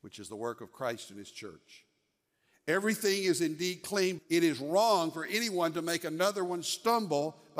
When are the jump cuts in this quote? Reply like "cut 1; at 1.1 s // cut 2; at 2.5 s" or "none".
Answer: cut 1; at 4.2 s